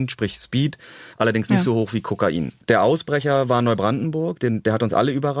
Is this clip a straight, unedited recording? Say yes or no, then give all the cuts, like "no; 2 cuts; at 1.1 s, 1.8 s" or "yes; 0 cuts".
no; 2 cuts; at 1.1 s, 2.6 s